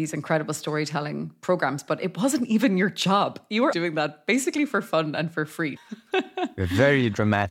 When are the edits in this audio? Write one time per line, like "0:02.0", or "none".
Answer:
0:03.7
0:05.8